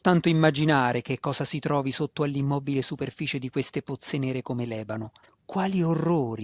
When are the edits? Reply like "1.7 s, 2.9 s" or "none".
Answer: 5.2 s